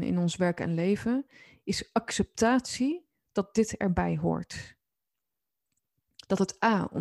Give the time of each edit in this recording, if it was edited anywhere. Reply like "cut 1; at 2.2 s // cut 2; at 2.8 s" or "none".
none